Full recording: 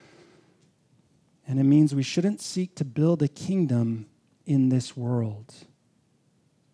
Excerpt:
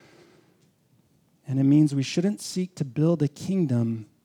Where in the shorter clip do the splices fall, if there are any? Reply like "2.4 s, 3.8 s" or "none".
none